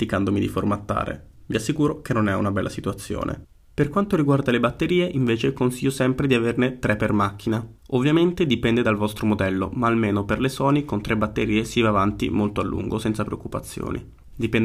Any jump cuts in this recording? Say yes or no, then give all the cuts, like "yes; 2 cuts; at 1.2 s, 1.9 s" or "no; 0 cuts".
no; 0 cuts